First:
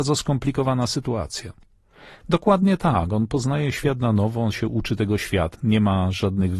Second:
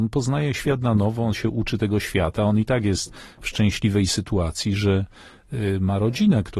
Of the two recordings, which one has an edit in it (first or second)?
first